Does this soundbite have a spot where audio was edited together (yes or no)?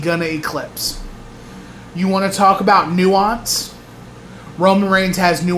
no